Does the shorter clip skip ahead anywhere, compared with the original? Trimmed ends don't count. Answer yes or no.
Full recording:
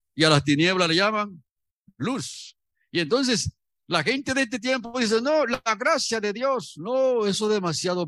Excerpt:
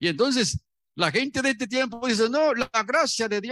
no